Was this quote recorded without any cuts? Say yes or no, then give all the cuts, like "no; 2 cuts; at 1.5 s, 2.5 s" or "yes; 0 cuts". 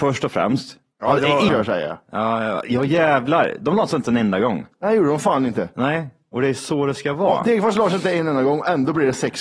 no; 1 cut; at 1.5 s